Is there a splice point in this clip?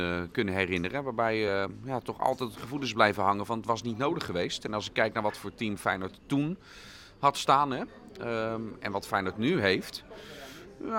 no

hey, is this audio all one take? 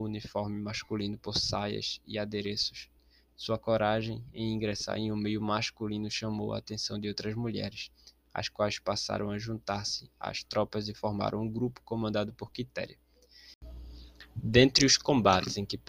yes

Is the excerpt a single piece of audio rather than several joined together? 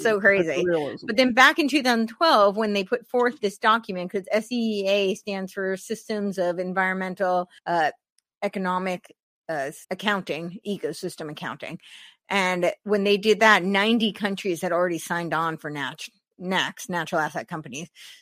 no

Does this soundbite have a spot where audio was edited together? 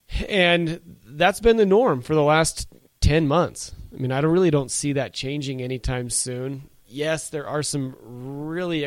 no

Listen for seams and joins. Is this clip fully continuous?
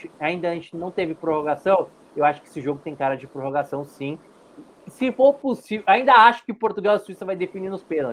yes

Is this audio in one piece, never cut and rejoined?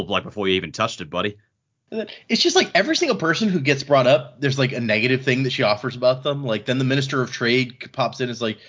yes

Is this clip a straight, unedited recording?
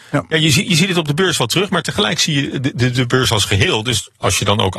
yes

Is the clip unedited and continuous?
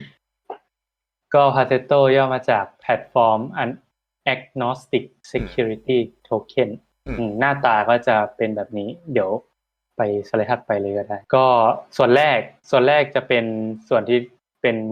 no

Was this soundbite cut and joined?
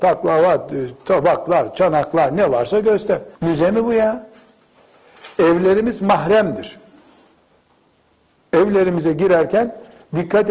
yes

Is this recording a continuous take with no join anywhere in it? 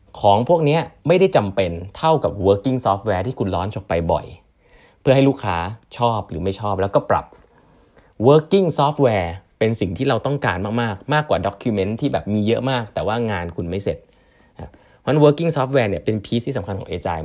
no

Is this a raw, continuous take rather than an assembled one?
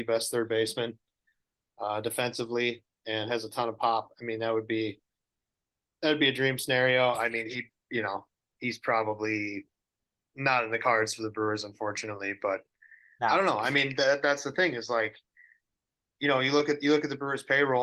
yes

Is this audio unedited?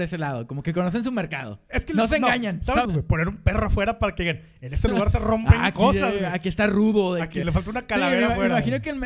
no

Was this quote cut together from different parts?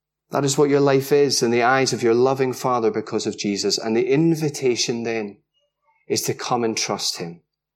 no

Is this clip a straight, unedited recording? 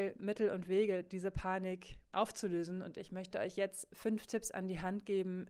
yes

